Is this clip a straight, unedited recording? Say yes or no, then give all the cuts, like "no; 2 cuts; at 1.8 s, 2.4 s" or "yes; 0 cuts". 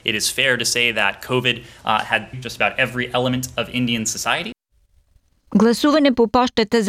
no; 1 cut; at 2.3 s